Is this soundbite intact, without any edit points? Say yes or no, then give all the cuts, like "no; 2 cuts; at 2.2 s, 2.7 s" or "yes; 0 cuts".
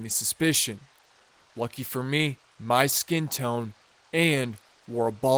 no; 1 cut; at 2.5 s